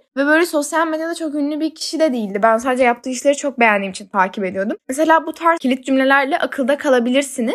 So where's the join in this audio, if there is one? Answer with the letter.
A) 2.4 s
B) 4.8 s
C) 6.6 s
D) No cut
D